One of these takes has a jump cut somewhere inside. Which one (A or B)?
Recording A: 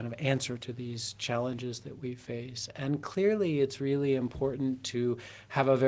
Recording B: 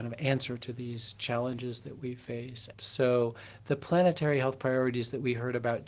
B